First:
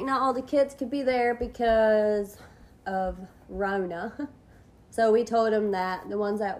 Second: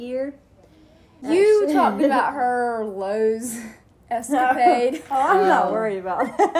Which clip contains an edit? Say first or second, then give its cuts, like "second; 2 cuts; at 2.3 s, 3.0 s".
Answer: second; 1 cut; at 1.2 s